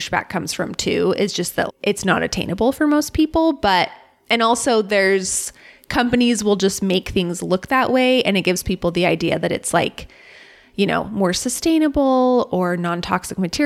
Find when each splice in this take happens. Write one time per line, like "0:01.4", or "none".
0:01.7